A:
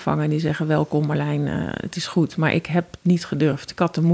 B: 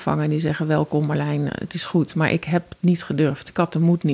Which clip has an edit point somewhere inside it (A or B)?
B